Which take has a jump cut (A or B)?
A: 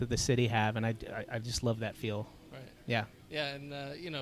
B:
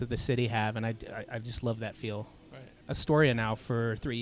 B